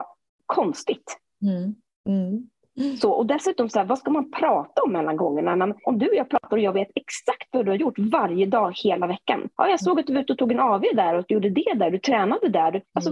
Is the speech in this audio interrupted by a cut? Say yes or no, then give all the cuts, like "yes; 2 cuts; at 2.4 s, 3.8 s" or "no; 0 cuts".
no; 0 cuts